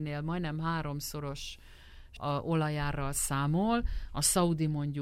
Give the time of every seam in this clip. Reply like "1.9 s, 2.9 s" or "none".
2.2 s